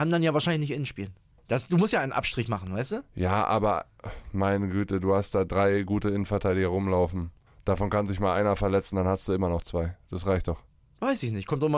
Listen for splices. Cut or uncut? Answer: uncut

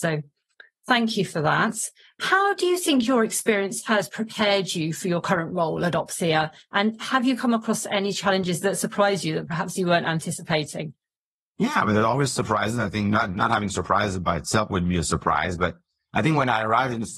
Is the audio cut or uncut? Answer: uncut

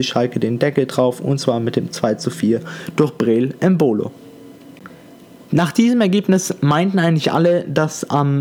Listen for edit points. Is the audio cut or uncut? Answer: uncut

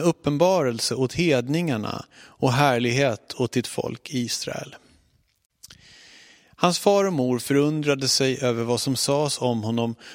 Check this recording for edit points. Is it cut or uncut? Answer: uncut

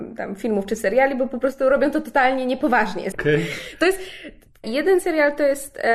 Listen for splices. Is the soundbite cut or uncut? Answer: cut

